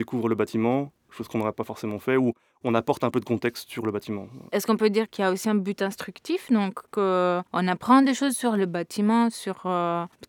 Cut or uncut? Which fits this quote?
cut